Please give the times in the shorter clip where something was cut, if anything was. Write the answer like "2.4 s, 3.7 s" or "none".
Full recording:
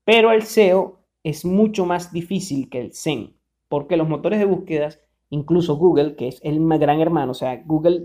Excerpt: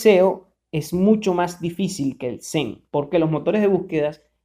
2.9 s